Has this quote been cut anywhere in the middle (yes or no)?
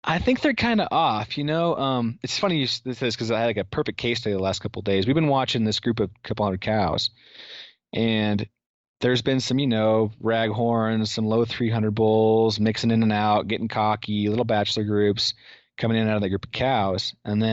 no